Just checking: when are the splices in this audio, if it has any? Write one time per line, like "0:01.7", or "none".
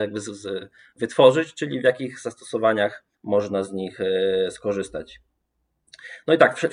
0:03.1